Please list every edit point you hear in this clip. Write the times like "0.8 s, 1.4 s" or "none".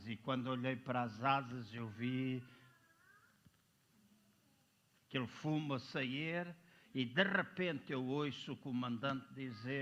none